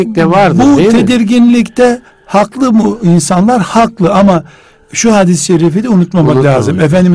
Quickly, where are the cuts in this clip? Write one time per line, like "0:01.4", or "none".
none